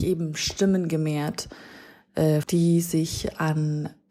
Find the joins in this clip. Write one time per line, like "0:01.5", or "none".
0:02.4